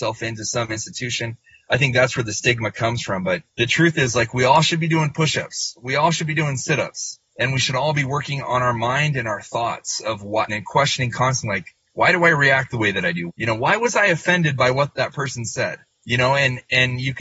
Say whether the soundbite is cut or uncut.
cut